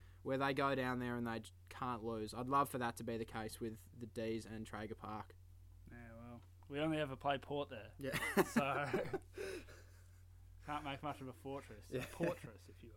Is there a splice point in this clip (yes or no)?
no